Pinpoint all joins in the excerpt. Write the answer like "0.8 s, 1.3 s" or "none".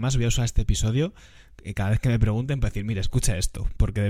none